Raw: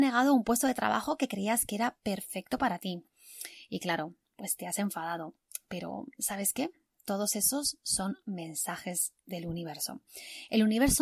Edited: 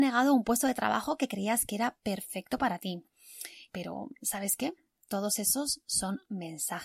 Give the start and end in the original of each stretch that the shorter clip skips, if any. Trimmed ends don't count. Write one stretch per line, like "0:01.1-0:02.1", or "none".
0:03.7-0:05.6